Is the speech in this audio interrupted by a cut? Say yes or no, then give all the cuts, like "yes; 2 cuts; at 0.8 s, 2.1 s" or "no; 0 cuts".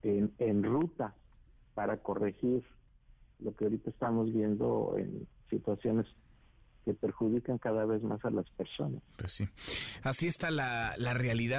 no; 0 cuts